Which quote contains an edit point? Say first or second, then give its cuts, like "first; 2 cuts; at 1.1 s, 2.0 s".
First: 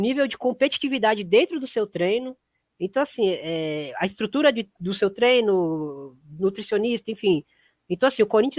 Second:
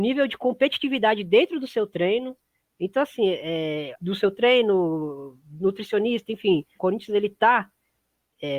second; 2 cuts; at 3.9 s, 6.8 s